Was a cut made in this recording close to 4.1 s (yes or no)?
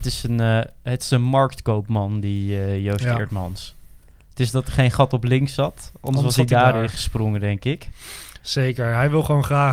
no